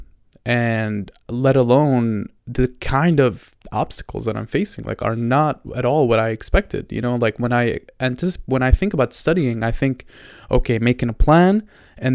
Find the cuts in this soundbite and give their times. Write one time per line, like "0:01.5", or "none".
0:01.2

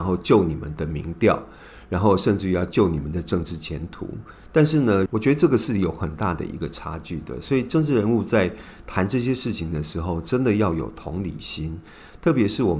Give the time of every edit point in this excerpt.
0:05.1

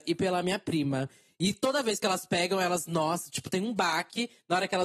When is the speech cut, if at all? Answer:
none

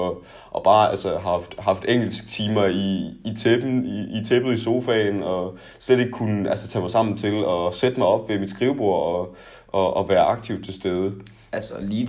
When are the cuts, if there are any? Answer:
none

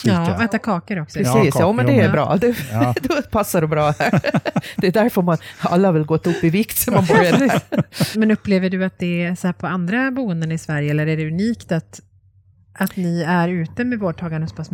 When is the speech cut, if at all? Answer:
none

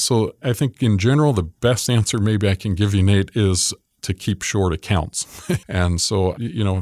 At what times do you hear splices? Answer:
0:05.6

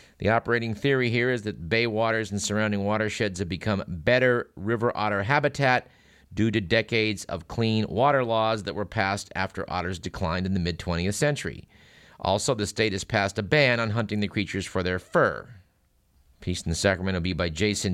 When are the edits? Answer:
none

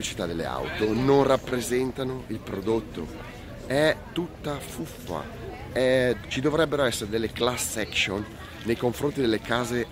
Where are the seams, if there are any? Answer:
0:06.2

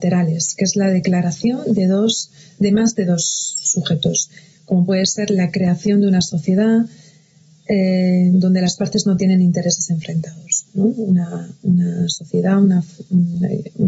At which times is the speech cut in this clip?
none

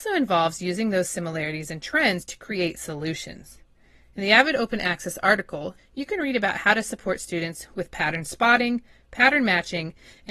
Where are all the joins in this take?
0:05.8

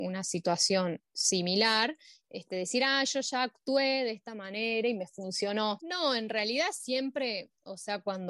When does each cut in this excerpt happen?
0:05.8

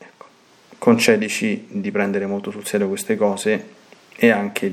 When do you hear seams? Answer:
none

